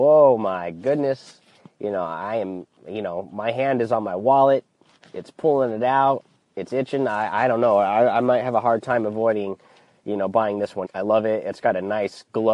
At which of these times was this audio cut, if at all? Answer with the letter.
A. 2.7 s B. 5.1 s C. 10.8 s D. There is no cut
C